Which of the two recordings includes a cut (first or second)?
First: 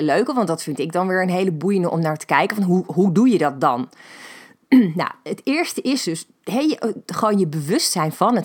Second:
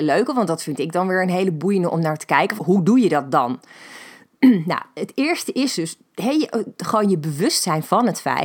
second